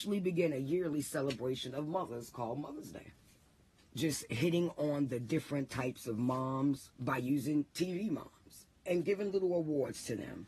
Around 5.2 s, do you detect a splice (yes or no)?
no